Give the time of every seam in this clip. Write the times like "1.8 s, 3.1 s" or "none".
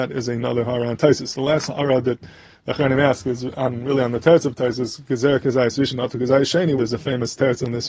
6.8 s